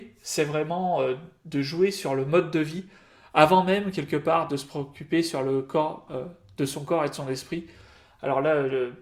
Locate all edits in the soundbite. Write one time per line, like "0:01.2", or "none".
0:06.1

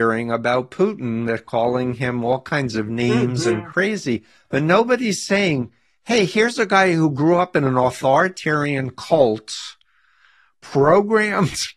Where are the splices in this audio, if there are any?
none

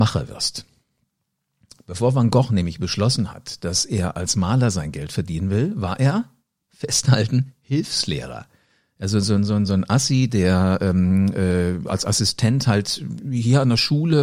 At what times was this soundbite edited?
none

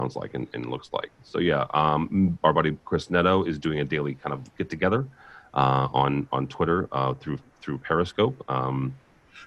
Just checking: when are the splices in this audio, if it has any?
0:04.5

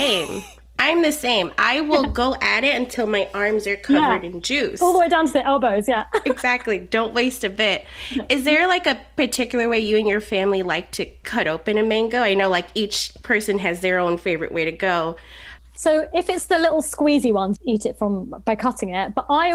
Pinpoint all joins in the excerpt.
0:15.6
0:17.6

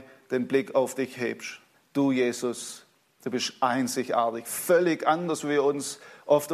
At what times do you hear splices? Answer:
0:01.7

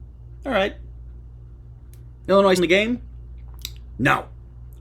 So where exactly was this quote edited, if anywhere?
0:02.6

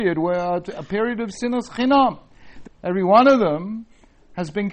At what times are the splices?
0:02.6

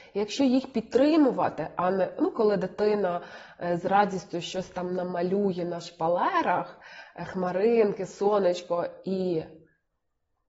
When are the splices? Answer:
none

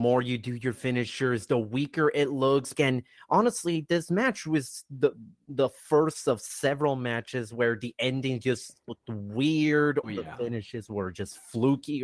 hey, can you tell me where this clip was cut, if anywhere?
0:02.7
0:10.0

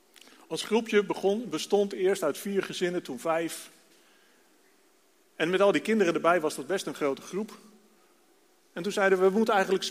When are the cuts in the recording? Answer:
none

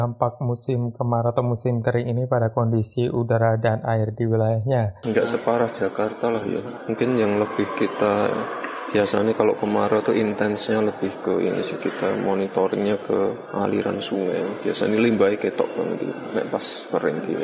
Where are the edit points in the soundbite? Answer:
0:05.0

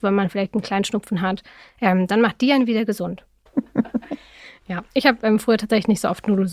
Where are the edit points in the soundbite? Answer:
0:03.5

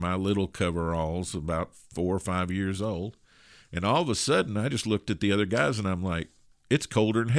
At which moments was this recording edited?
none

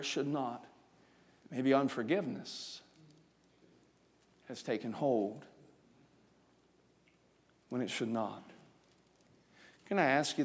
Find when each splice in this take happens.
0:01.4

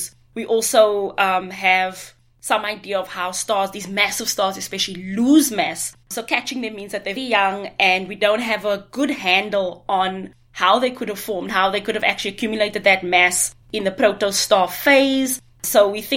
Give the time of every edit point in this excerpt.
0:06.0
0:07.2

